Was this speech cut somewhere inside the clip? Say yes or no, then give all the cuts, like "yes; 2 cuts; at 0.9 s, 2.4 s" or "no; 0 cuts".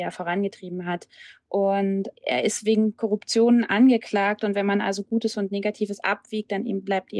no; 0 cuts